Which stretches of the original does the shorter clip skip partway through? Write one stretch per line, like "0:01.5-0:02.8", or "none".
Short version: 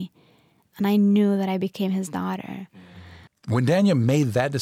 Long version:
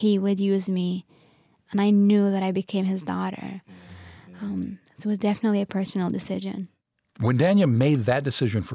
0:04.2-0:07.0